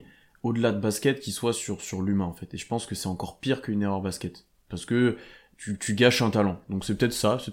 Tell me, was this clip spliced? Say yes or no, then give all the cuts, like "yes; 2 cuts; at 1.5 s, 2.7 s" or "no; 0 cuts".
no; 0 cuts